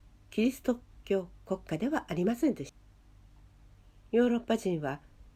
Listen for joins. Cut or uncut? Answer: uncut